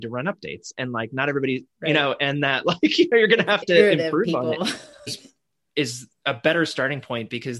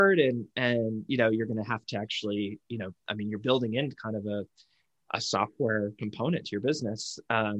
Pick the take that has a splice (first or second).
first